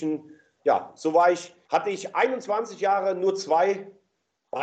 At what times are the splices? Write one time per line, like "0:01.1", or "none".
0:01.6